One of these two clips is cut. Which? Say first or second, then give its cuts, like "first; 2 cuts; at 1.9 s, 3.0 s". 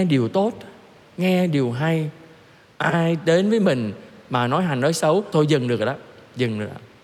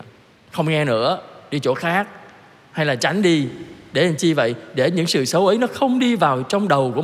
first; 1 cut; at 5.3 s